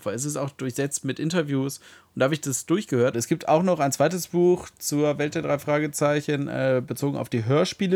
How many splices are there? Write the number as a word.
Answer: one